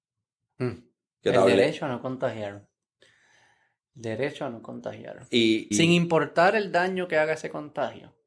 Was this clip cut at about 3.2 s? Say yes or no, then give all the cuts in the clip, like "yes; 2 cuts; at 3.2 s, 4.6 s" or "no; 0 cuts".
no; 1 cut; at 5.7 s